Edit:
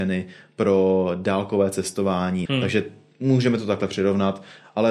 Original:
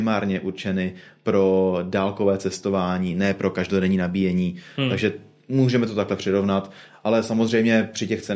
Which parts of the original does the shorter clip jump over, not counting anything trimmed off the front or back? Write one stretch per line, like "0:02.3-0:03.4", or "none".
0:03.1-0:04.7